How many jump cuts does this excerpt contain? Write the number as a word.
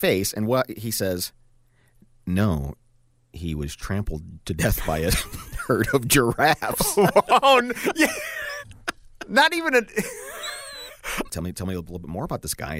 two